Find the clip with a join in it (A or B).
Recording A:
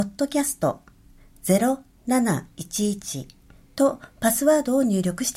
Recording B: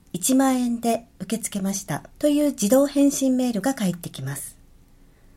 B